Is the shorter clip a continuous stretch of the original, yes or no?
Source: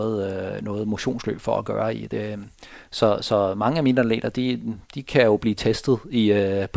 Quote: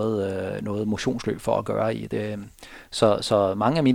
yes